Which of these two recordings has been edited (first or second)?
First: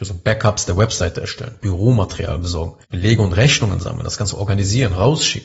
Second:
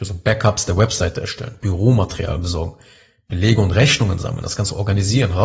first